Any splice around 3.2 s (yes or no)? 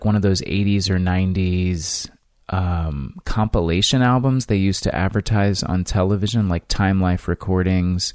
no